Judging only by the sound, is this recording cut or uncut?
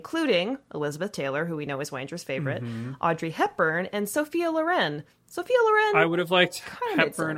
uncut